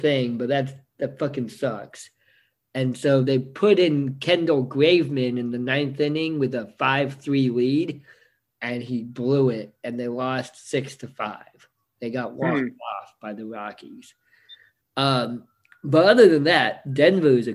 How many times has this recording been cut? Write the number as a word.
one